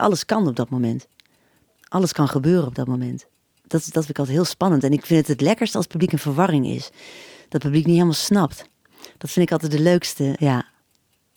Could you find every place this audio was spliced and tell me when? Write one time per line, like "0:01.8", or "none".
0:10.4